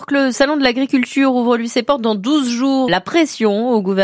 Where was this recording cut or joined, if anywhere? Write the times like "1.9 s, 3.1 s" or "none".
2.9 s